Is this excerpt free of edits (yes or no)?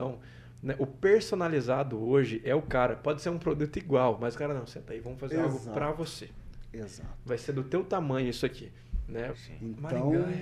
no